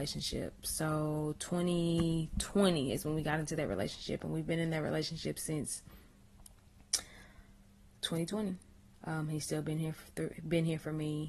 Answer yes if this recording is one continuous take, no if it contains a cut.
no